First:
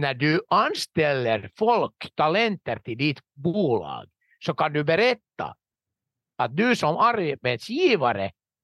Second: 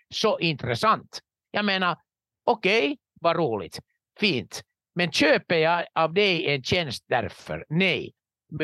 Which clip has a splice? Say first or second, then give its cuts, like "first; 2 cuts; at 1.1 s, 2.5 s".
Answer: second; 1 cut; at 3.1 s